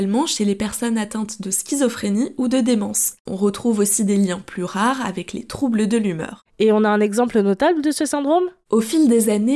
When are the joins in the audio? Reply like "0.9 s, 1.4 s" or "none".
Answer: 3.3 s